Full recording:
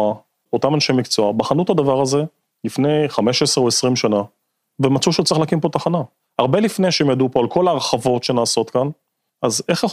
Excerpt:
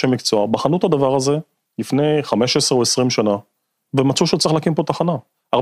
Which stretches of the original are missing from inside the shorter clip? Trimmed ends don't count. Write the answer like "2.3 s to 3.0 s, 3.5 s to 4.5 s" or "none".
none